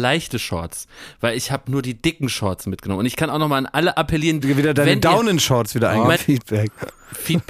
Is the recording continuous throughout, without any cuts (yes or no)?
no